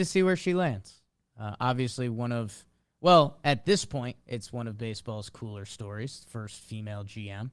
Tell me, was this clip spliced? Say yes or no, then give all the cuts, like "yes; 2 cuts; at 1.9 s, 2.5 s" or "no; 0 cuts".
no; 0 cuts